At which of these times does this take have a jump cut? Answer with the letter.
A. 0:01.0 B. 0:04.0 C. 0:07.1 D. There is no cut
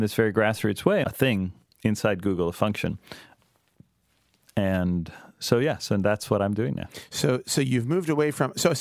A